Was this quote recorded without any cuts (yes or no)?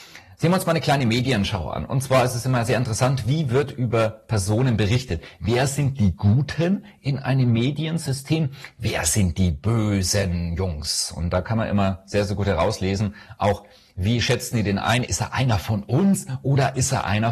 yes